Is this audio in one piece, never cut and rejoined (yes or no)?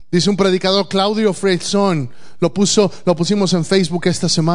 yes